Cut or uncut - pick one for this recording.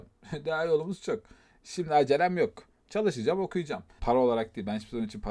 cut